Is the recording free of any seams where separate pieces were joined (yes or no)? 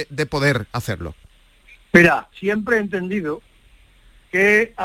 no